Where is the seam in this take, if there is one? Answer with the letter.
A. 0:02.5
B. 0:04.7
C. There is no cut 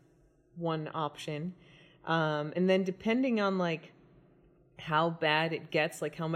C